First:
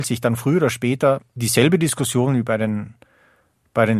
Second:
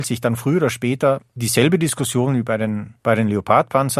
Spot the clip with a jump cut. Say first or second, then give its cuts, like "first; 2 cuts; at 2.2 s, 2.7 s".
second; 1 cut; at 3.0 s